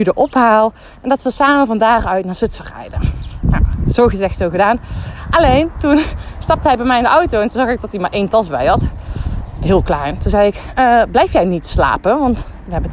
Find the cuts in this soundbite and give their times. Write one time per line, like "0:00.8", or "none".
none